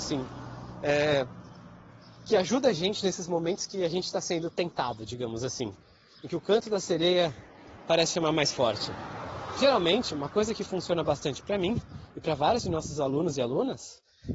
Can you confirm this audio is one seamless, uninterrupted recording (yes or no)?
yes